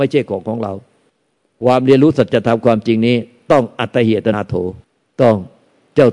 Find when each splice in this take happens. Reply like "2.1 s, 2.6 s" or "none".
4.3 s

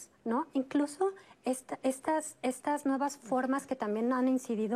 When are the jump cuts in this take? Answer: none

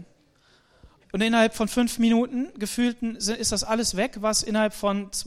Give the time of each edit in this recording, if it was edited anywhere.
1.0 s

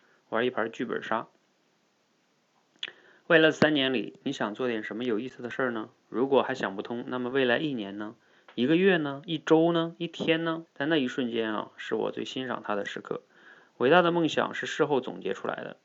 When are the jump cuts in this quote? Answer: 10.7 s

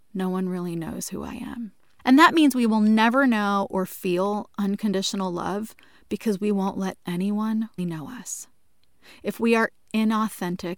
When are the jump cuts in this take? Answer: 2.0 s, 7.8 s

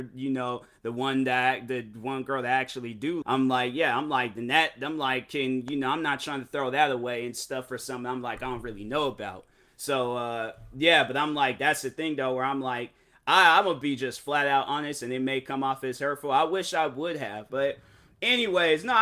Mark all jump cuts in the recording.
3.2 s, 17.5 s

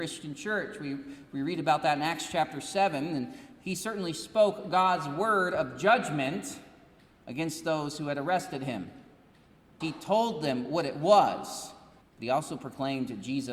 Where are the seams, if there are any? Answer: 9.8 s, 12.0 s

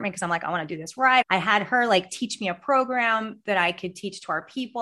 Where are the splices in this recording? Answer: 1.2 s

